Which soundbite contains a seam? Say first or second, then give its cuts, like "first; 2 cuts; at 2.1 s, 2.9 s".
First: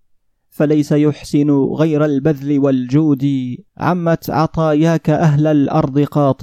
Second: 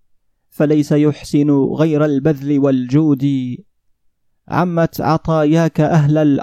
first; 1 cut; at 3.7 s